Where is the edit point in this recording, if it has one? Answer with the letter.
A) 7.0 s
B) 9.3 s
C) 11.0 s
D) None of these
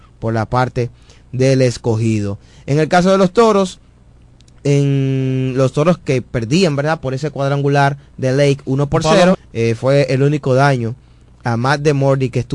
B